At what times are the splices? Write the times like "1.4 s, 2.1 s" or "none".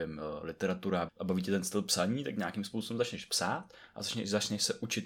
1.1 s